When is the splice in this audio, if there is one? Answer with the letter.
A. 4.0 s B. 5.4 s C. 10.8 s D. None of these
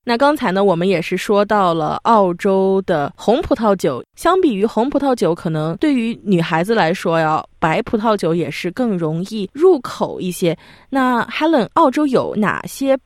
A